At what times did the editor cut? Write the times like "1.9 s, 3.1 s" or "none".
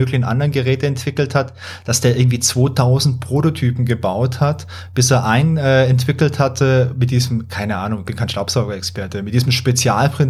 none